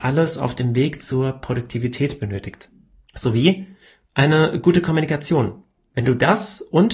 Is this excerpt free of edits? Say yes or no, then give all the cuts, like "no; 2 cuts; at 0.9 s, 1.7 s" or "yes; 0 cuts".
no; 2 cuts; at 3.1 s, 5.8 s